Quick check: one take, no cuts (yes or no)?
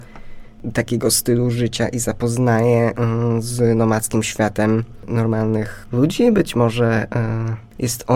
yes